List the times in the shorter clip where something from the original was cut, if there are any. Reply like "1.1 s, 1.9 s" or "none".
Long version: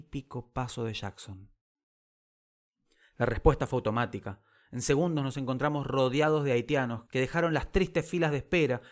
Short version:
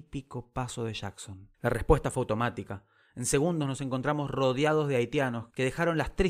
1.5 s